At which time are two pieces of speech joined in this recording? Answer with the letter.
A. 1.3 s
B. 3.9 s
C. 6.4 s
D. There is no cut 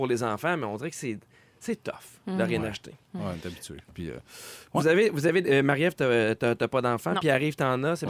B